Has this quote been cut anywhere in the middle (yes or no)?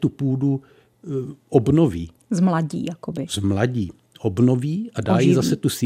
no